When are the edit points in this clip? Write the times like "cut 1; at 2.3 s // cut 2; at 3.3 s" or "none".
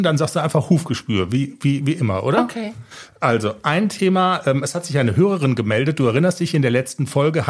none

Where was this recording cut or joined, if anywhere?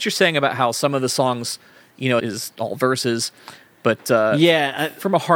cut 1; at 2.2 s

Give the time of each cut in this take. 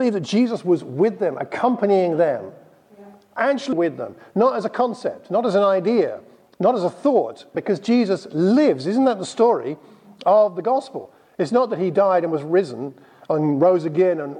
cut 1; at 3.7 s // cut 2; at 7.5 s

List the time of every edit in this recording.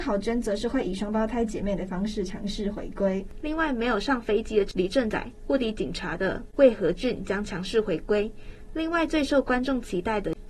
cut 1; at 3.4 s

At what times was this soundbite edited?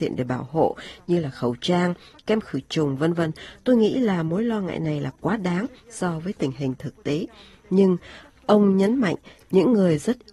none

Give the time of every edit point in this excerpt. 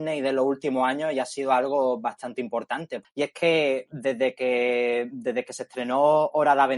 cut 1; at 3.0 s

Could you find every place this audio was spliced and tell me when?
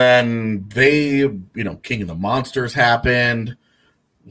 none

